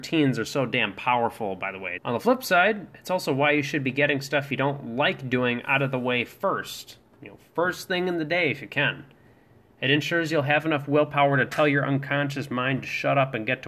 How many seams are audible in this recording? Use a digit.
1